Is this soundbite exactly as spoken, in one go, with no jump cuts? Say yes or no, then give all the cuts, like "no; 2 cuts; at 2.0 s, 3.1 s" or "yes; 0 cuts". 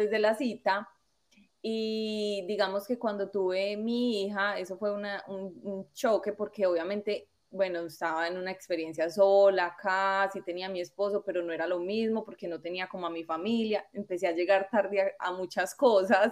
no; 1 cut; at 15.2 s